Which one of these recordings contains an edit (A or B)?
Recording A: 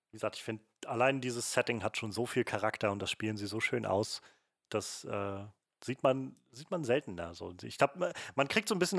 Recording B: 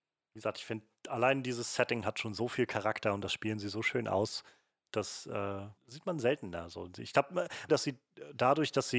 B